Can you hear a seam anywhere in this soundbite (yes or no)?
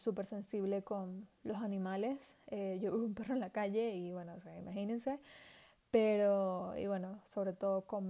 no